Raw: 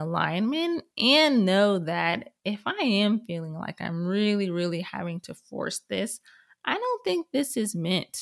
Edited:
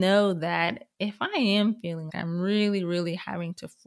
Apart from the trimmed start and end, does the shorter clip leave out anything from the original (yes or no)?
yes